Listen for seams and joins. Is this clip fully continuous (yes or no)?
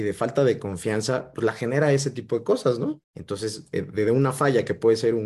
no